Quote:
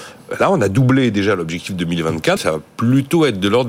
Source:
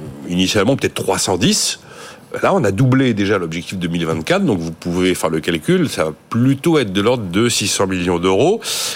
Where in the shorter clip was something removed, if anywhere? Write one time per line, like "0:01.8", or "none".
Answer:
0:02.4